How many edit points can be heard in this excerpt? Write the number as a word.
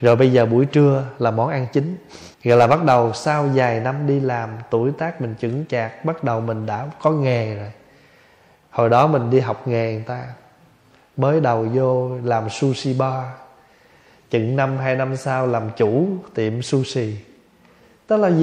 one